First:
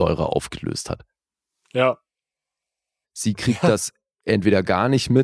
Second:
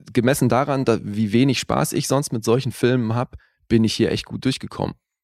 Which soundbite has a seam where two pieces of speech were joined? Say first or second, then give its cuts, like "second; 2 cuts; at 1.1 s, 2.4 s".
first; 1 cut; at 3.0 s